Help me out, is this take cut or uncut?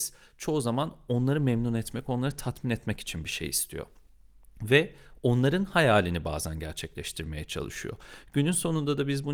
uncut